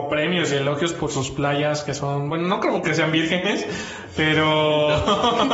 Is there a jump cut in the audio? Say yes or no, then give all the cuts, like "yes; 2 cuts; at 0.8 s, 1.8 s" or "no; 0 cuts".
no; 0 cuts